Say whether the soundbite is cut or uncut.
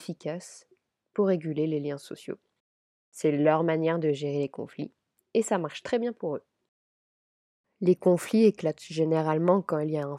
uncut